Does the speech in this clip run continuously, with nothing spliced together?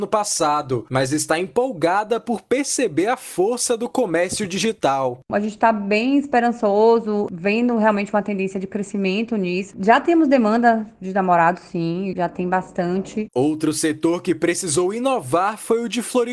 no; 2 cuts; at 9.7 s, 13.3 s

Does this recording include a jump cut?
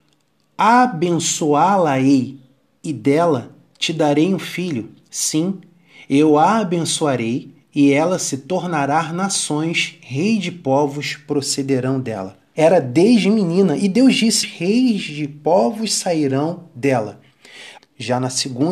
yes; 3 cuts; at 12.5 s, 14.4 s, 17.8 s

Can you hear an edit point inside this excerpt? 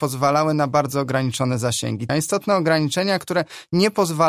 yes; 1 cut; at 2.1 s

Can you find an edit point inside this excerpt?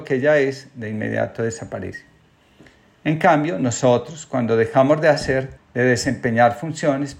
yes; 1 cut; at 5.6 s

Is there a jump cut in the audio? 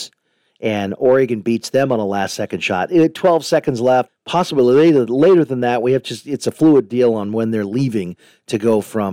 yes; 1 cut; at 4.1 s

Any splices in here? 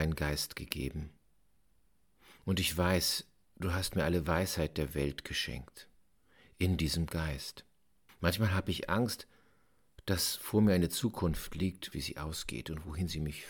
yes; 2 cuts; at 8.1 s, 11.9 s

